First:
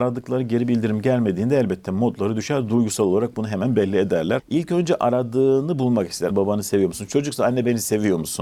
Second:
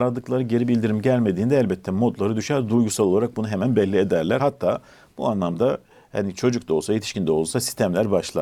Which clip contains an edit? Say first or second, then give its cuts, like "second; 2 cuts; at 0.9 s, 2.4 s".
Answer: first; 2 cuts; at 4.4 s, 6.3 s